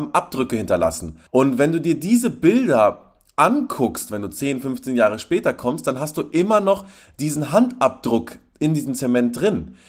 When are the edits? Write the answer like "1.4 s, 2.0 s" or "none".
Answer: 1.3 s